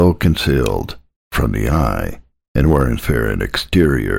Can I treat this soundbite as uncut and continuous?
no; 2 cuts; at 1.2 s, 3.0 s

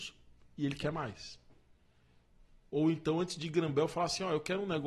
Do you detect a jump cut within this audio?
yes; 1 cut; at 2.7 s

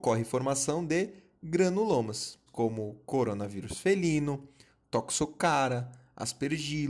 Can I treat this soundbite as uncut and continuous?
no; 1 cut; at 2.5 s

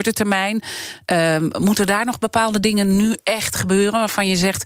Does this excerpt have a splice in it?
no; 0 cuts

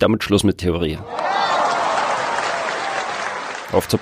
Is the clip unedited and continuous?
yes; 0 cuts

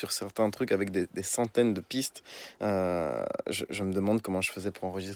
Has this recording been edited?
no; 0 cuts

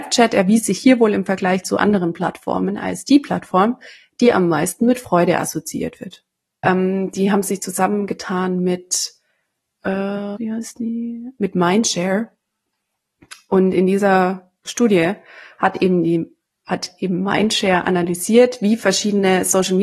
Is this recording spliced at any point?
yes; 2 cuts; at 6.6 s, 10.4 s

